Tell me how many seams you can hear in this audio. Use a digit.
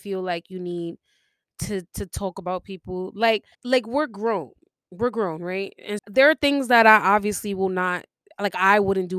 2